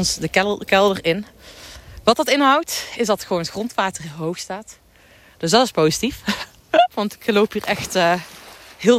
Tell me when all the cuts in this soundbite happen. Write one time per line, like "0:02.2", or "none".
0:06.9